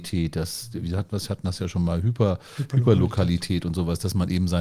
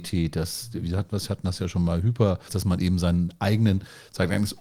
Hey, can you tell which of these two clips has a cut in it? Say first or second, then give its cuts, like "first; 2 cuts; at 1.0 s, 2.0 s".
second; 1 cut; at 2.5 s